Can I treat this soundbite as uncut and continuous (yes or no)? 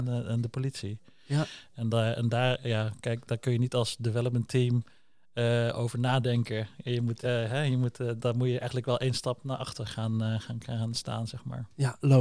yes